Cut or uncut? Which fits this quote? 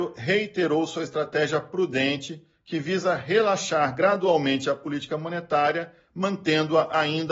uncut